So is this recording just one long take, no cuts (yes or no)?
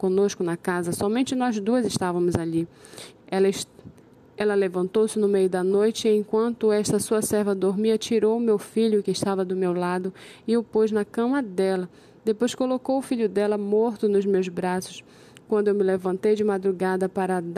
no